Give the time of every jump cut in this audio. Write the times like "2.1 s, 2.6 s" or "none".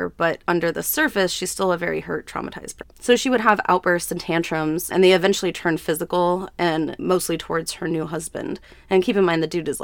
2.8 s, 4.9 s, 7.0 s